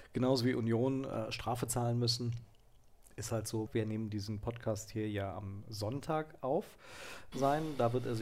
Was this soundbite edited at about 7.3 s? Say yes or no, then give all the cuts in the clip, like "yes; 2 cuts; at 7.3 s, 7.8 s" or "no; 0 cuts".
yes; 2 cuts; at 3.7 s, 7.3 s